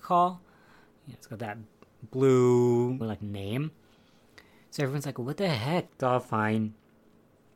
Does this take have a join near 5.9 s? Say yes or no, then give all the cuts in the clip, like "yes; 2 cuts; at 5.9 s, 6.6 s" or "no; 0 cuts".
yes; 2 cuts; at 3.0 s, 5.9 s